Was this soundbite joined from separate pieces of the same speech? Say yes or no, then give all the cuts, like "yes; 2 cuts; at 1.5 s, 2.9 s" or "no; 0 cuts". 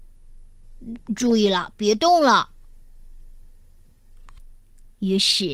yes; 2 cuts; at 1.0 s, 4.4 s